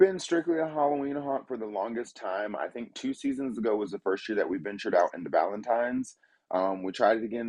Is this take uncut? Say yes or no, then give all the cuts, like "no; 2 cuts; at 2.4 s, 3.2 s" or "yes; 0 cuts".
yes; 0 cuts